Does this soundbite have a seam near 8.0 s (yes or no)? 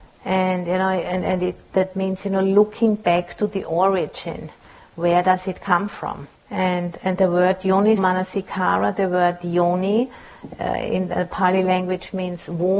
yes